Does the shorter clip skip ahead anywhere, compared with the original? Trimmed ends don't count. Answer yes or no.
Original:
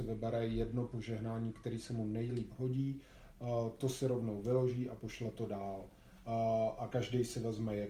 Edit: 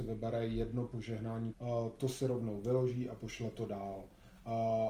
yes